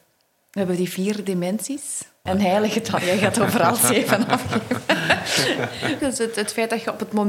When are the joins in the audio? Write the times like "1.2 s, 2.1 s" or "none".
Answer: 2.3 s, 6.0 s